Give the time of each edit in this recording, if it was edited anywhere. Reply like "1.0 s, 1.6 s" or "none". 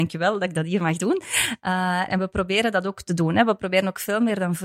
2.1 s